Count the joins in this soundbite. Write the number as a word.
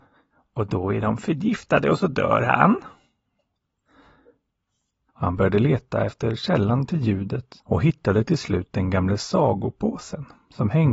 two